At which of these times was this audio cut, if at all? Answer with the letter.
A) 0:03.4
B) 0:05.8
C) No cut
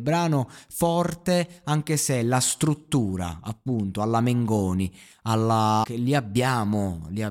B